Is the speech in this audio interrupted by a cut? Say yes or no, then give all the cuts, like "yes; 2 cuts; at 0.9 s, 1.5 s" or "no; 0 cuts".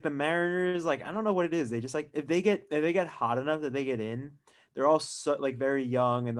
no; 0 cuts